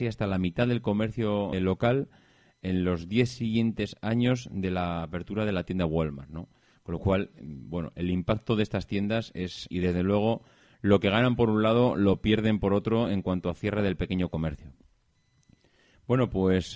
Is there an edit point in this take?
yes; 2 cuts; at 1.5 s, 9.7 s

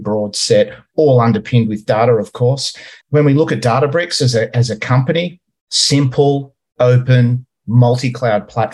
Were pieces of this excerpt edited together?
yes; 1 cut; at 3.0 s

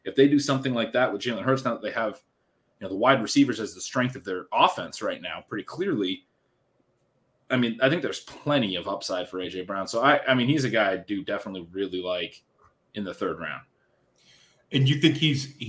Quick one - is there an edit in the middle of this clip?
no; 0 cuts

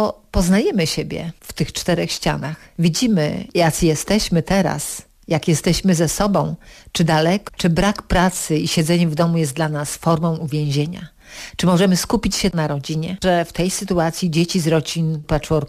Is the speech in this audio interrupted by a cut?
yes; 2 cuts; at 7.5 s, 13.2 s

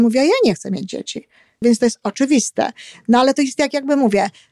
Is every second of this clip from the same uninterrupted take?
no; 1 cut; at 1.6 s

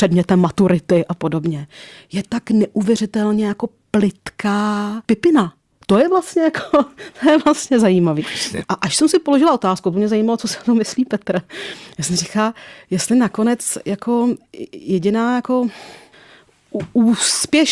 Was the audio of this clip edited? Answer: yes; 2 cuts; at 5.0 s, 8.6 s

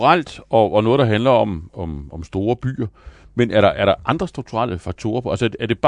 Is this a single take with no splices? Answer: yes; 0 cuts

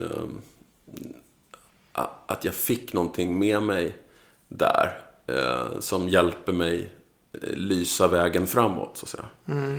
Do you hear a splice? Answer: no; 0 cuts

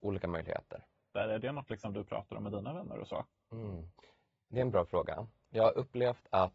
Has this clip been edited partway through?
yes; 1 cut; at 1.1 s

